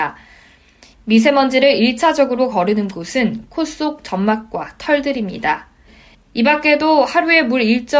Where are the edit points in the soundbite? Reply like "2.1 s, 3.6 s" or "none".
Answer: 0.9 s, 6.1 s